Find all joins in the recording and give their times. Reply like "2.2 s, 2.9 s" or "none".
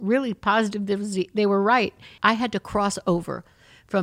2.2 s